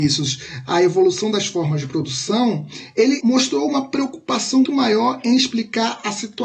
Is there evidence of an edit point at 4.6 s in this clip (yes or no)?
yes